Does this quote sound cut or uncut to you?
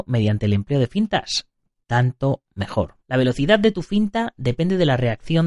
cut